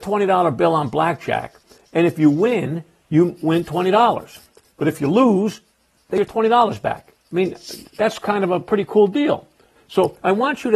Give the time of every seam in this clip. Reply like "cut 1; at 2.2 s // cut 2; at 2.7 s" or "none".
cut 1; at 9.8 s